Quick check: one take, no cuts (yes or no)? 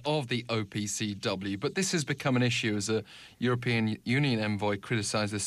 yes